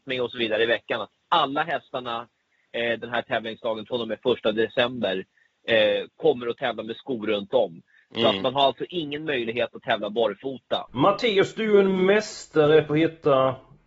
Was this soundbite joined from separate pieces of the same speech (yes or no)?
yes